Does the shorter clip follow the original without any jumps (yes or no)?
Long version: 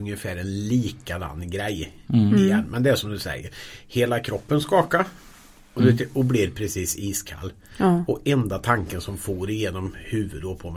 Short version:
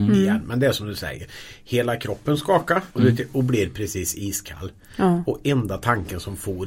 no